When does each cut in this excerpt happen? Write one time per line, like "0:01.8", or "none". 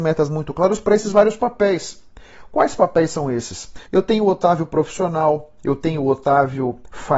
0:03.8